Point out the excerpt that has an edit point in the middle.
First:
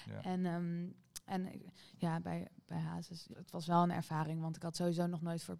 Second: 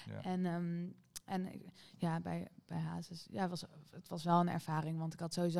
first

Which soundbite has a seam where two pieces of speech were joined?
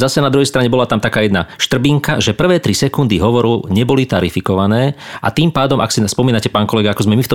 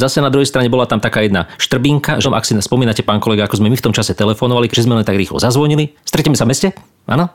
second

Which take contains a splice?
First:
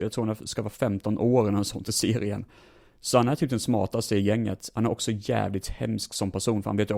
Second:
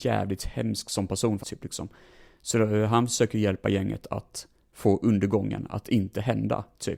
second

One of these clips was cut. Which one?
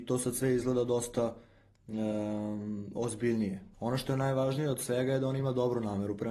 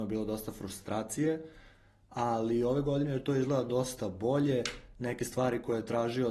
first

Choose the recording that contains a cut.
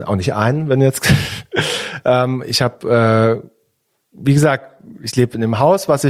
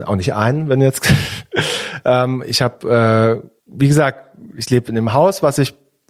second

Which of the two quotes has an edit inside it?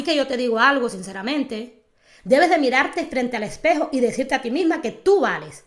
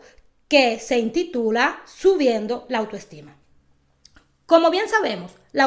first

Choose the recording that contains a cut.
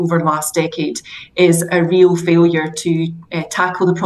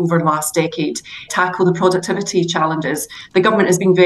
second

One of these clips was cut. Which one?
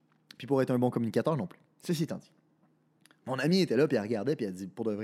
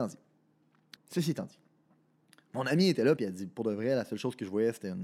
second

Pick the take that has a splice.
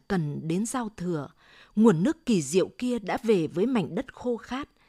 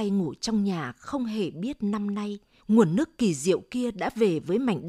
second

